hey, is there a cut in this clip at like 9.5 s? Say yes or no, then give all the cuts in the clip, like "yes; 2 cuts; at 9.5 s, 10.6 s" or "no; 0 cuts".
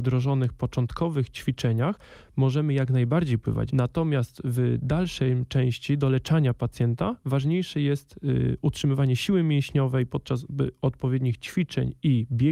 no; 1 cut; at 3.7 s